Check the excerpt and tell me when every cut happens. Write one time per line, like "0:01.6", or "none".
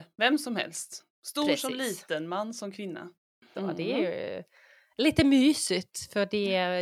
0:03.5